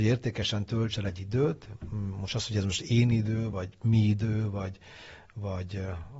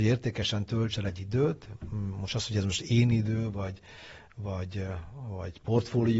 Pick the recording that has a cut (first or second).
second